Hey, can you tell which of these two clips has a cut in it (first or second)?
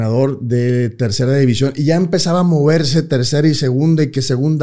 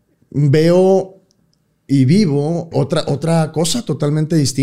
second